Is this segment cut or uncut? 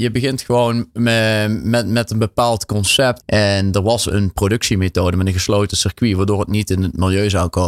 cut